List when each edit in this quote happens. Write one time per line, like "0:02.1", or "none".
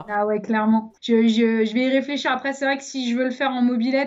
0:01.0